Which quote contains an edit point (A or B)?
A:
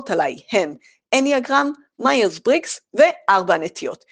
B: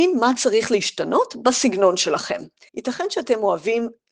B